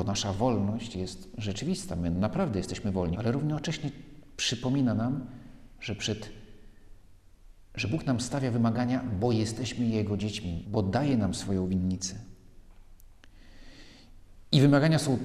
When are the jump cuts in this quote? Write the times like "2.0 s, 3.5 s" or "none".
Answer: 3.1 s, 10.6 s